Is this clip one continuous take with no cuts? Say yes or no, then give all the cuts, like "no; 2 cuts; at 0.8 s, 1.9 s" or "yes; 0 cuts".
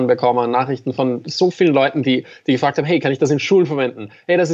yes; 0 cuts